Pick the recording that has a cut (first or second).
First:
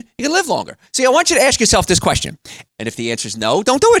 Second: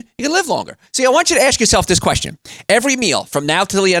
first